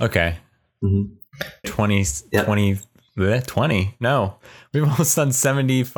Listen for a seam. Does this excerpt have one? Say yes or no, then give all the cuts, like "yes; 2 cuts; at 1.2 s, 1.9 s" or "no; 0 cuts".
yes; 1 cut; at 1.6 s